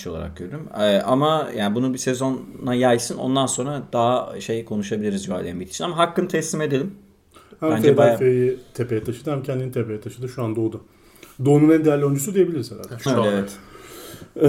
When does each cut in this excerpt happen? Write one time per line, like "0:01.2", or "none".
0:13.1